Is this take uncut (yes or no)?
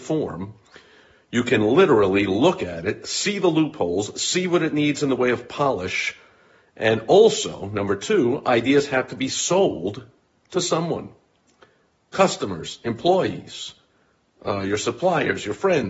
yes